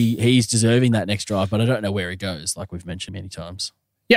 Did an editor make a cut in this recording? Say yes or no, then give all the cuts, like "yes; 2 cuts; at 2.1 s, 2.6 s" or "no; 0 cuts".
yes; 1 cut; at 3.1 s